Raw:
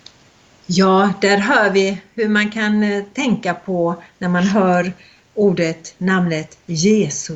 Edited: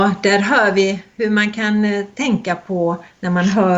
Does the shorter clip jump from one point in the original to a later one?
no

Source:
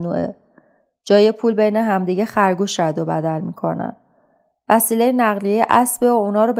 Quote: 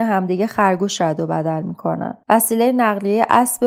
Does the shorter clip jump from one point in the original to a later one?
yes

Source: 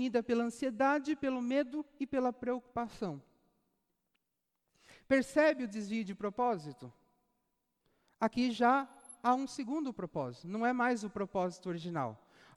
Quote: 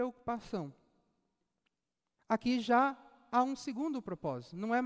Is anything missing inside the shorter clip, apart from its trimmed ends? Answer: yes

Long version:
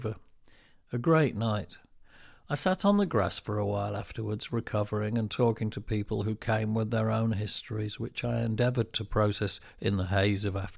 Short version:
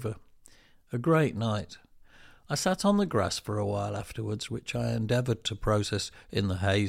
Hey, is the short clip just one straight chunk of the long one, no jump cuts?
no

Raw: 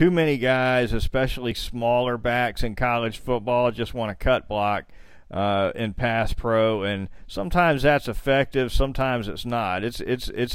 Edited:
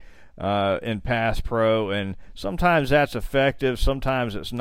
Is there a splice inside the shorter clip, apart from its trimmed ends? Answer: no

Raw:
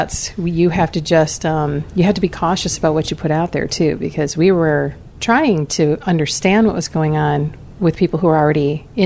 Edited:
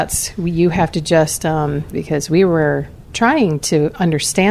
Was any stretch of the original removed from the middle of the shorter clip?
yes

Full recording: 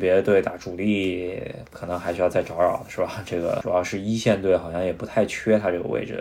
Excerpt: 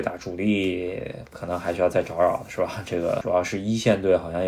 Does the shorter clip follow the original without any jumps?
yes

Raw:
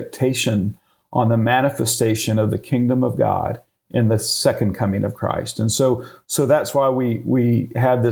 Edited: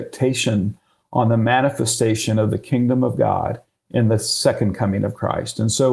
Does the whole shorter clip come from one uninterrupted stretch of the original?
yes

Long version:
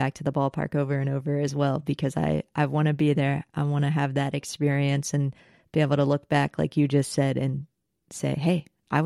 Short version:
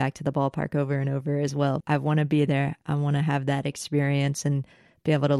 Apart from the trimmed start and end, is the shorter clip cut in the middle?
yes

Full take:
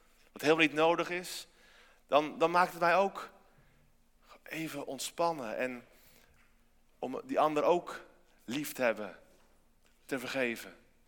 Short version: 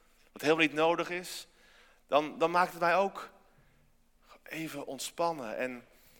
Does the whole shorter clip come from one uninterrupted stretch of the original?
yes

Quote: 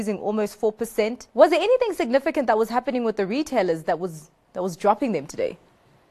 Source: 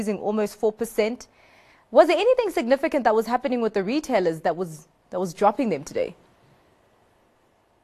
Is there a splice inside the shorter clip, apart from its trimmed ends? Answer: yes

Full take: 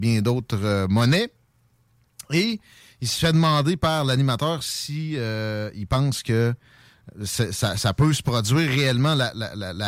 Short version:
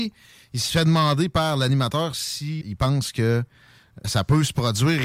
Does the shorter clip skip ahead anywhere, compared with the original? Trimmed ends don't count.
yes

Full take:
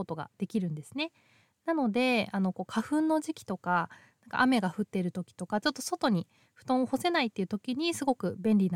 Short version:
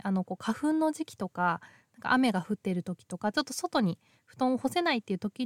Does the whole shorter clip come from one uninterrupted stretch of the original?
yes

